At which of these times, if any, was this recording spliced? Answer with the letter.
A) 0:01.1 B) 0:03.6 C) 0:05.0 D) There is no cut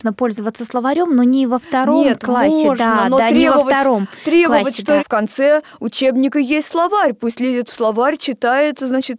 C